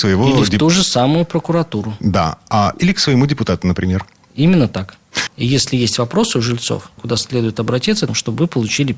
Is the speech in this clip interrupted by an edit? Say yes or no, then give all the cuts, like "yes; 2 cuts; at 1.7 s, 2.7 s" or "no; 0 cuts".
yes; 3 cuts; at 5.3 s, 7.0 s, 8.1 s